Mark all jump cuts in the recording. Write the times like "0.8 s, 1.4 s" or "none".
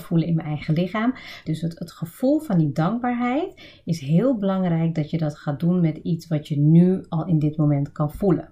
1.5 s